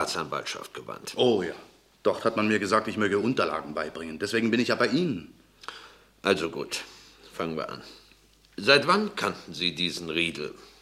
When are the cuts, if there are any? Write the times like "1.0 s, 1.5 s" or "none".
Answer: 1.9 s